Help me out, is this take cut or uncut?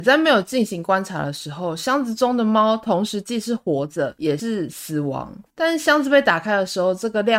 cut